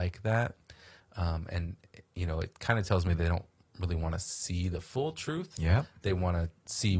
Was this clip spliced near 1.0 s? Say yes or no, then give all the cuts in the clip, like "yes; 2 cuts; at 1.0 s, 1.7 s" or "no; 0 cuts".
no; 0 cuts